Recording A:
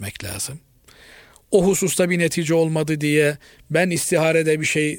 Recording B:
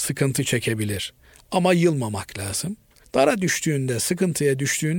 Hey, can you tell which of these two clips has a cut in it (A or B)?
B